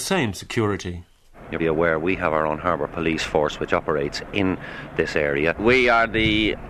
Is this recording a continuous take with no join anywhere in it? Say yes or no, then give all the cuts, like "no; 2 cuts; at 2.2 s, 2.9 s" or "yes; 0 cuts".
no; 2 cuts; at 1.6 s, 5.5 s